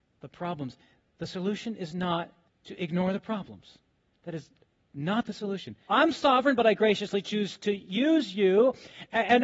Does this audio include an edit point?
yes; 1 cut; at 5.9 s

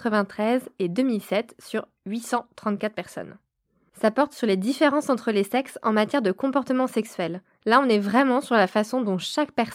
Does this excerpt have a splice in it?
yes; 1 cut; at 7.6 s

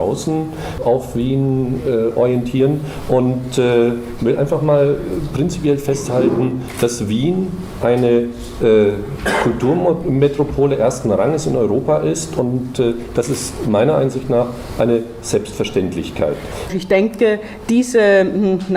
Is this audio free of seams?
no; 1 cut; at 16.7 s

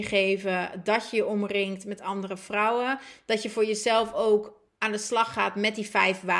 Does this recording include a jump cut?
no; 0 cuts

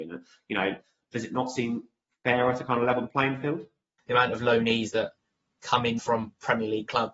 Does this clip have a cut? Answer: yes; 2 cuts; at 4.0 s, 6.0 s

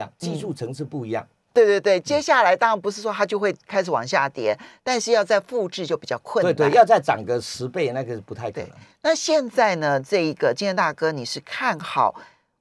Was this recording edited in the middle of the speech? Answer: yes; 1 cut; at 1.5 s

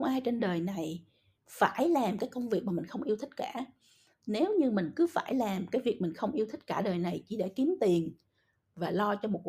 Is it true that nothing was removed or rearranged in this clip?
yes; 0 cuts

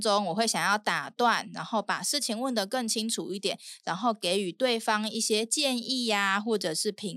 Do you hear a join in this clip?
no; 0 cuts

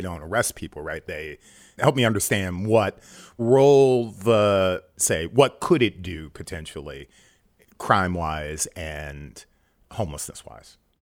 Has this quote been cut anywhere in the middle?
yes; 1 cut; at 5.0 s

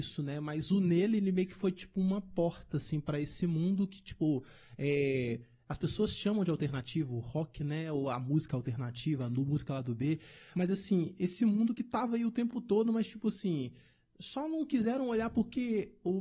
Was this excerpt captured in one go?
yes; 0 cuts

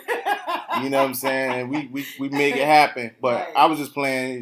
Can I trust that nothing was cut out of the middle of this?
yes; 0 cuts

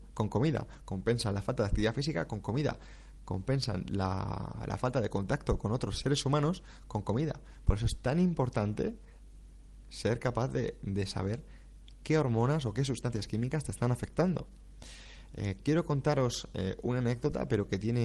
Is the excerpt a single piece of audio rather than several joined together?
yes; 0 cuts

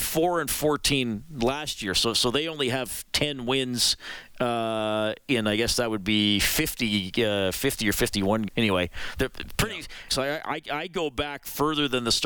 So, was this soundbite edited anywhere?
yes; 2 cuts; at 8.5 s, 10.1 s

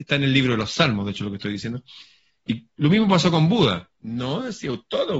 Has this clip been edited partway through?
yes; 2 cuts; at 2.5 s, 3.9 s

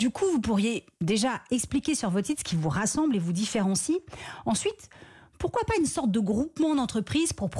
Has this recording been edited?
no; 0 cuts

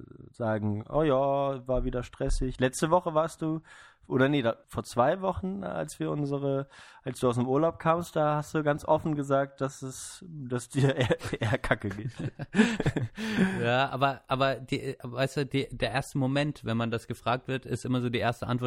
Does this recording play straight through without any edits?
no; 1 cut; at 4.6 s

